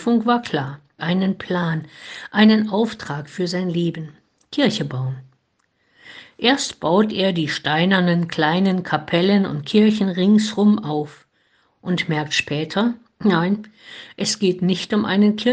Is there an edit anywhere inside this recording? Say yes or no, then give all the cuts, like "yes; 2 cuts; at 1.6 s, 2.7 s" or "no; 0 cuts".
yes; 1 cut; at 1.0 s